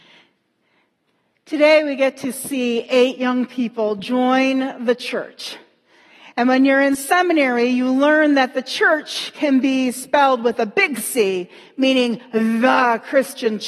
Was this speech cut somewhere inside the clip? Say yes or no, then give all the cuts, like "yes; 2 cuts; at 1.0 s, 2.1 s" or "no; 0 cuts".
no; 0 cuts